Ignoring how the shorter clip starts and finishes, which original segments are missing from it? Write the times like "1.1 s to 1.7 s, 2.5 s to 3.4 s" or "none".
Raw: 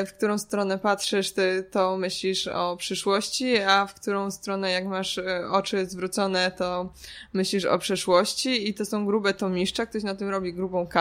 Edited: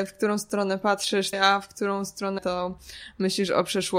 1.3 s to 3.6 s, 4.6 s to 6.5 s